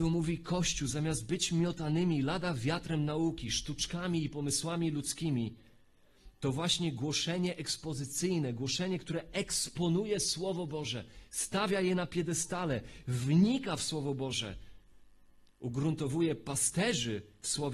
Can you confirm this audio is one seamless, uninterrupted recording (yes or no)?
yes